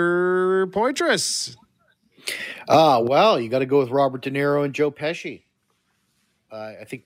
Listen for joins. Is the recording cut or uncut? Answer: uncut